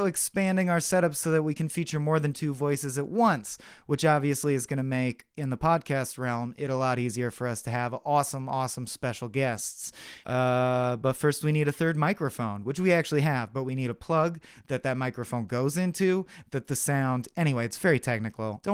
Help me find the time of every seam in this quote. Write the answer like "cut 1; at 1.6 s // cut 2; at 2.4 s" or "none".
none